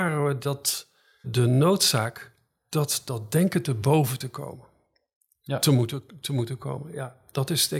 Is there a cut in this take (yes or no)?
yes